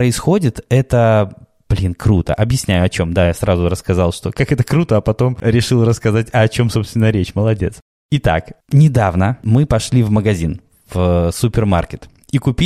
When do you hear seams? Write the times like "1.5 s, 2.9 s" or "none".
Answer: none